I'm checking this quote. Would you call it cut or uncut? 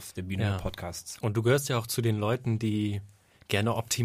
uncut